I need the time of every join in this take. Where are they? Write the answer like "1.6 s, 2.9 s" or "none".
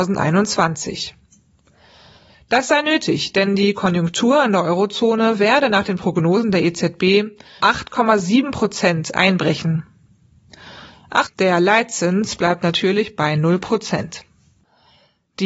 7.6 s, 11.3 s